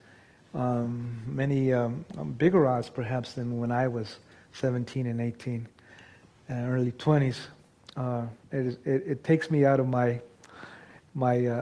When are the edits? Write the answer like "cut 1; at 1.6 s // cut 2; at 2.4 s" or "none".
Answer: cut 1; at 8.4 s